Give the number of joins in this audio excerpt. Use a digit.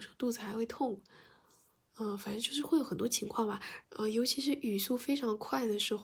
1